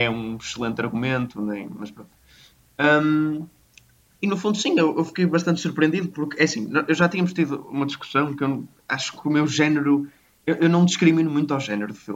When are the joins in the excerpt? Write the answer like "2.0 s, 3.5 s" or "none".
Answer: none

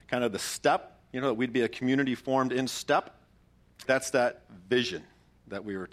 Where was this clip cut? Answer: 3.9 s

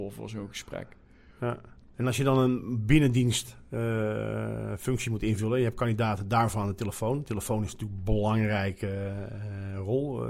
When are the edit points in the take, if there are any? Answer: 1.9 s

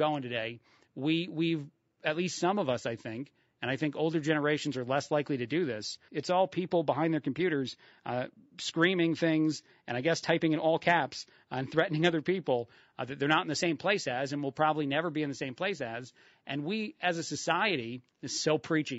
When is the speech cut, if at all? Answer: 6.1 s

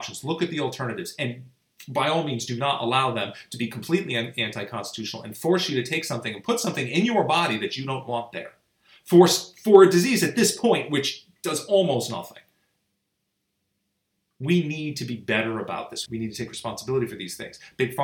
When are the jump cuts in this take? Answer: 16.1 s

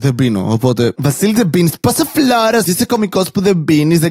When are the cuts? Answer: 2.7 s

